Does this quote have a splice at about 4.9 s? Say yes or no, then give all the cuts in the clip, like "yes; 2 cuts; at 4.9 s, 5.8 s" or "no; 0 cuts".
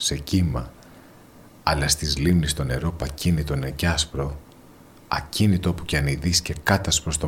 no; 0 cuts